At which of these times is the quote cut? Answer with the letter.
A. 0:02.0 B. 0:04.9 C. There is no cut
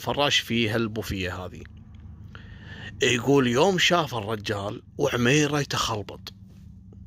B